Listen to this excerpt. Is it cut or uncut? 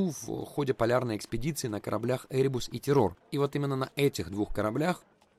cut